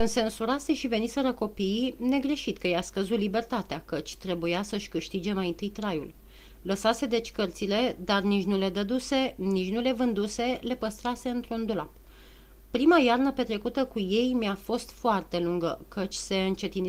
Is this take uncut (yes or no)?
yes